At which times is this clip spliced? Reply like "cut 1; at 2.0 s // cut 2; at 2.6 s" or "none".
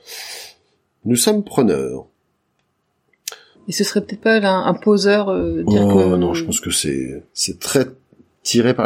cut 1; at 3.5 s // cut 2; at 7.3 s